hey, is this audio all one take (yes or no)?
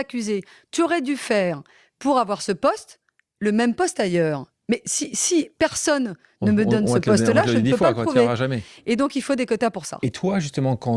yes